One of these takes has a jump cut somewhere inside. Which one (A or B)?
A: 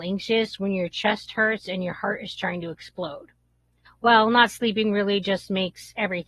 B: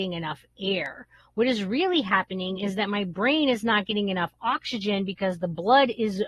A